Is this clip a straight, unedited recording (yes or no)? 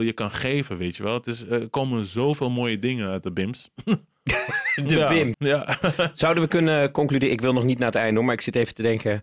no